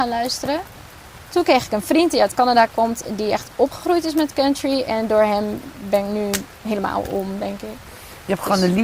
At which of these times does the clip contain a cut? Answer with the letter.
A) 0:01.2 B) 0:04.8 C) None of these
A